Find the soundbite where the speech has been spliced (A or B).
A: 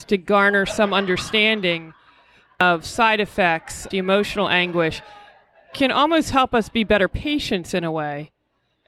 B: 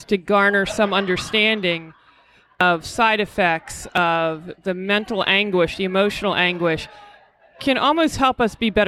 A